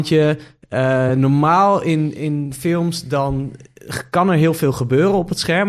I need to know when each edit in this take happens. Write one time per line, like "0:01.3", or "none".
none